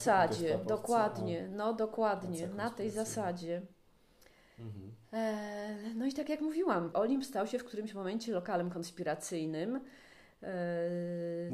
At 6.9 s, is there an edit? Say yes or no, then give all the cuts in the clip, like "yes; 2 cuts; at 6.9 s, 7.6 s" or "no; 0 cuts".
yes; 1 cut; at 6.9 s